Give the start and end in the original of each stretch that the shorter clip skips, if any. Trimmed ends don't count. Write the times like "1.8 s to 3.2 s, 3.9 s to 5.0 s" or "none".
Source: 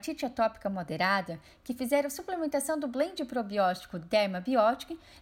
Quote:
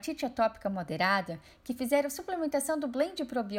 none